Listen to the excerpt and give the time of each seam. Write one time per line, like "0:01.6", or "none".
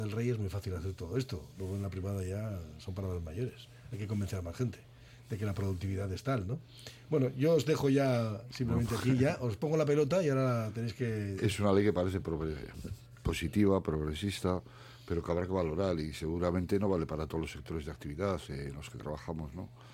0:11.4